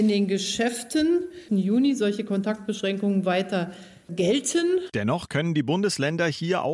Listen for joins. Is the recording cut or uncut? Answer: cut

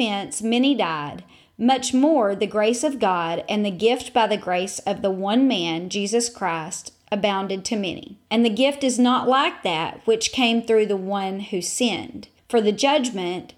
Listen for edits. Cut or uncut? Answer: uncut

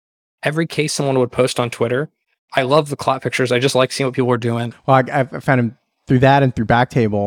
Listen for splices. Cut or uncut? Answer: cut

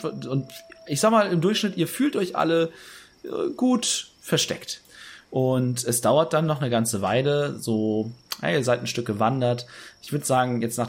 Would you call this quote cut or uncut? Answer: uncut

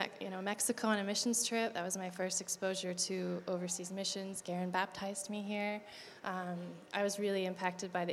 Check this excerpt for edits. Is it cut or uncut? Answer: uncut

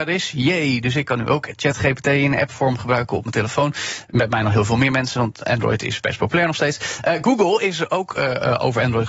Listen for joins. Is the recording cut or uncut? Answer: uncut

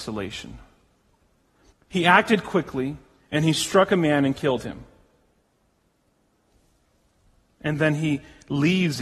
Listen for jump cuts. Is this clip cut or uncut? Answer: cut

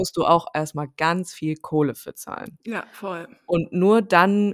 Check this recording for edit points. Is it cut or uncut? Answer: uncut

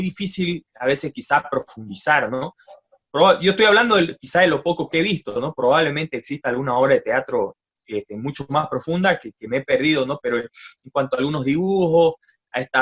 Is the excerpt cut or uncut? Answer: uncut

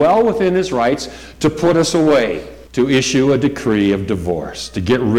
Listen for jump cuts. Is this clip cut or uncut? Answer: cut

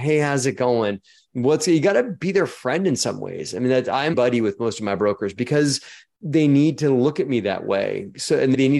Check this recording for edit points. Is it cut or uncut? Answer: cut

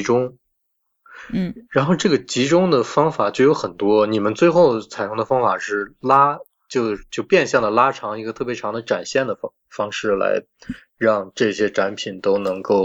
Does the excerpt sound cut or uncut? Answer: uncut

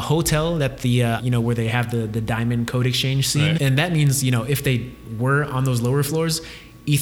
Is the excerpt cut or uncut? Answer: cut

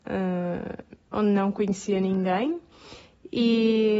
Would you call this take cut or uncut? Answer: uncut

